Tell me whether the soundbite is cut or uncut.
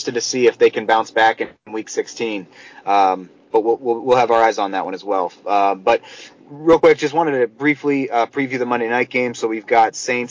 uncut